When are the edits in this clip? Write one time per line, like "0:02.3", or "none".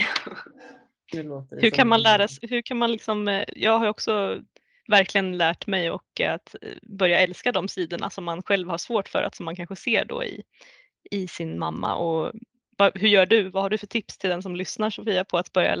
0:02.4

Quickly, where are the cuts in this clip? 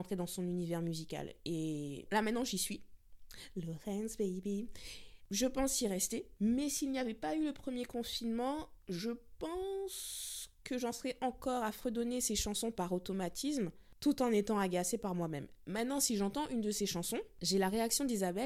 0:02.1

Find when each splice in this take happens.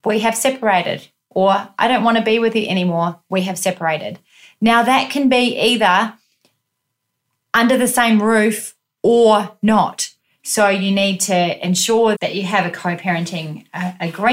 0:10.4
0:12.1

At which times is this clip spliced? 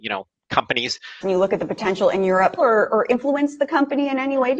0:01.2
0:02.6

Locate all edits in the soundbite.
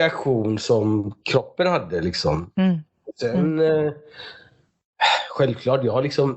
none

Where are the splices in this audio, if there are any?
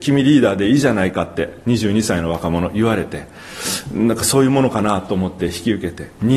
none

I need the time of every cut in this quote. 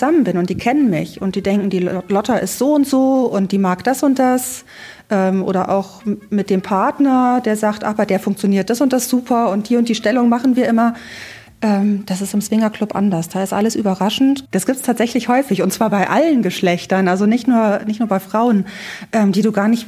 0:14.5

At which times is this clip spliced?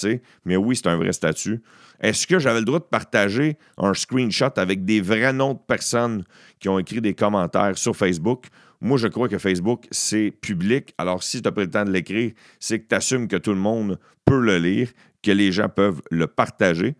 none

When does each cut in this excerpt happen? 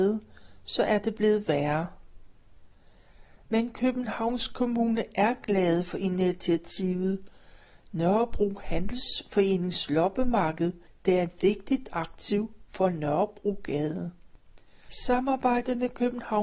none

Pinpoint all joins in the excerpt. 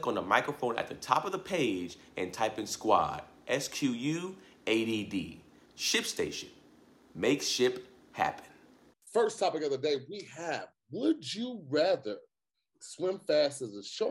none

